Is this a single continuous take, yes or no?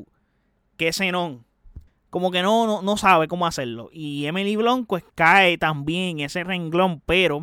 no